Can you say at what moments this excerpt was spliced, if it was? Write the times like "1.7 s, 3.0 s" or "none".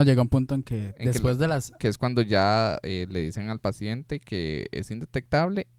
1.8 s